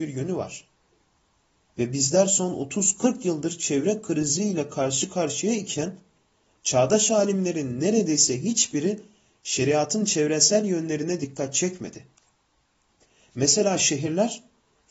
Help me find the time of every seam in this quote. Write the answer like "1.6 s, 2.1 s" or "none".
none